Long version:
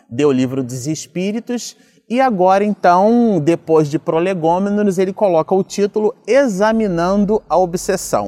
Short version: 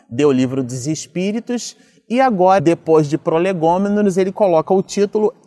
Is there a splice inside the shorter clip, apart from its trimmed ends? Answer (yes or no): yes